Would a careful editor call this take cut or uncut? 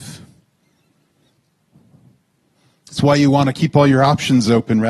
uncut